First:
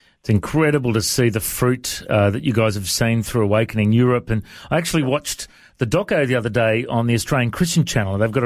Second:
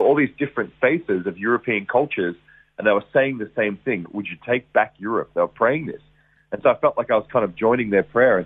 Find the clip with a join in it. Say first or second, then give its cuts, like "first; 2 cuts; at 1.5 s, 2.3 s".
second; 1 cut; at 4.0 s